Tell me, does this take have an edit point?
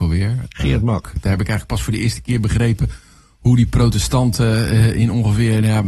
yes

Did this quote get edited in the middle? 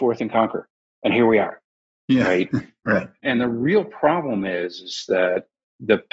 yes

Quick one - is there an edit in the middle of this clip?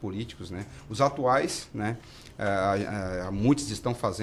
no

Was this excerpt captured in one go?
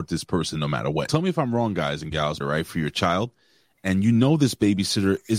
no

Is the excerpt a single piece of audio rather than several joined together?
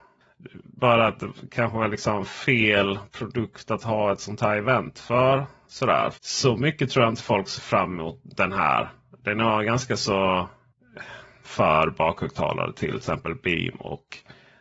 no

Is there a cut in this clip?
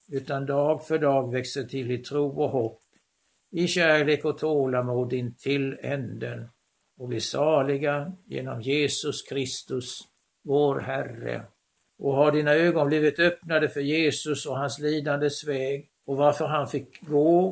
yes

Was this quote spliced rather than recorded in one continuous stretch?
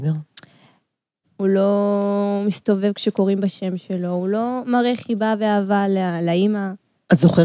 yes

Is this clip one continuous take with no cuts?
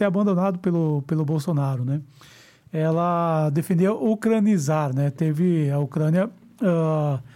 yes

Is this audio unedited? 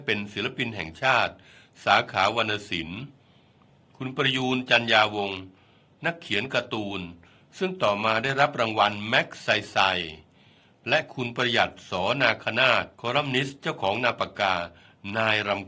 no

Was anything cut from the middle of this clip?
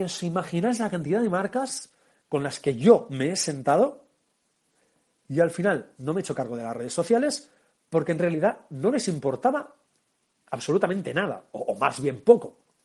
no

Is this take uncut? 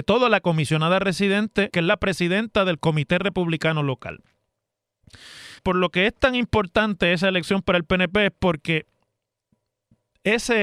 no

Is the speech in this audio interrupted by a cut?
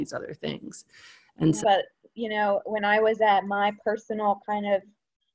yes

